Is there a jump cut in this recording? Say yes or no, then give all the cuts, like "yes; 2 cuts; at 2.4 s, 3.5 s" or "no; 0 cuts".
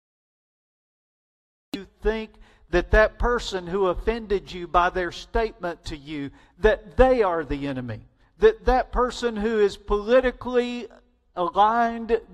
yes; 1 cut; at 8.2 s